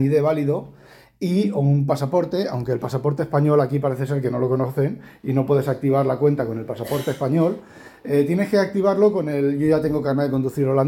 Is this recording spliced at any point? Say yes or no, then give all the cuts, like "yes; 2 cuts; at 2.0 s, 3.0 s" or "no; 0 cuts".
no; 0 cuts